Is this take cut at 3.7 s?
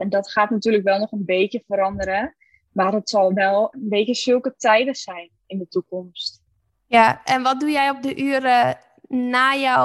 yes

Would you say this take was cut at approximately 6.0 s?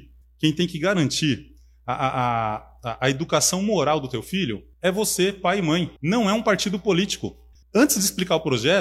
yes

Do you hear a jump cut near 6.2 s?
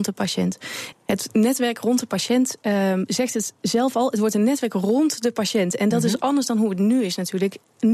no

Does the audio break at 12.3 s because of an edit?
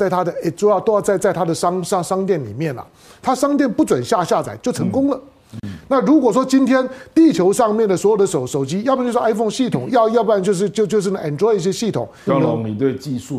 yes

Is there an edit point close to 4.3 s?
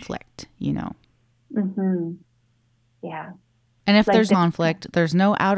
yes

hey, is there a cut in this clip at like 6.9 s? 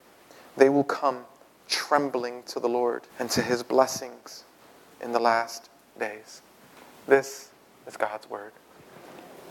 no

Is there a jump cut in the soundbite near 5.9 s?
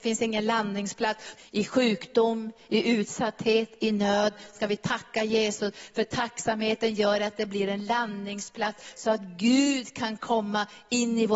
no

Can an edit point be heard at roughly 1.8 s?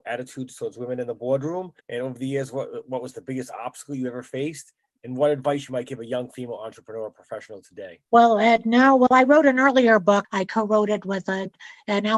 yes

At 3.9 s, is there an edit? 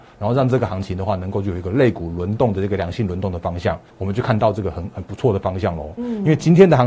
yes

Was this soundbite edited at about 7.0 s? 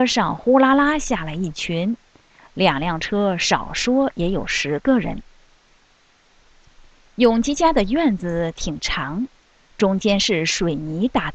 yes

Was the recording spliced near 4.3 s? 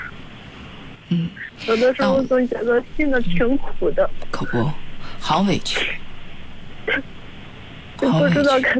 no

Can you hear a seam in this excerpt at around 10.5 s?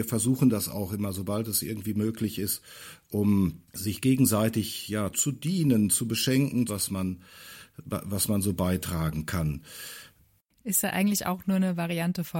no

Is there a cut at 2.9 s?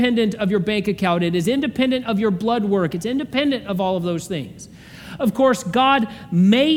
yes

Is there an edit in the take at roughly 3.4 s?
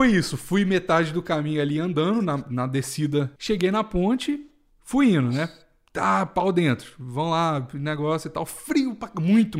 yes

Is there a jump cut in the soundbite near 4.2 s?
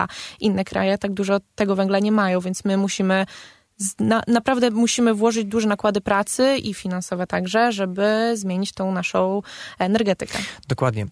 no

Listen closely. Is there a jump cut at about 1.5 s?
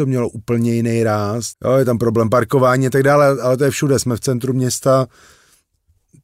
yes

